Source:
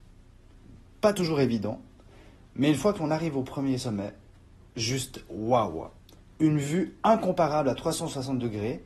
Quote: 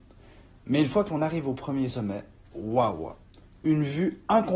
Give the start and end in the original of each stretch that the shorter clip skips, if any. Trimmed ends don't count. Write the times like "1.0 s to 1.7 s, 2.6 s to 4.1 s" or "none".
4.4 s to 5.3 s